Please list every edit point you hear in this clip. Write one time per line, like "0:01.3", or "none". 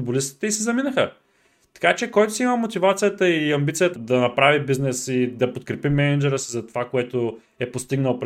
0:04.0